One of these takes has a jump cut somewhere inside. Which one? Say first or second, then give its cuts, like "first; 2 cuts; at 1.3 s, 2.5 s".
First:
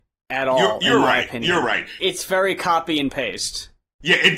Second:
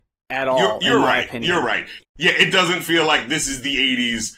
second; 1 cut; at 2.0 s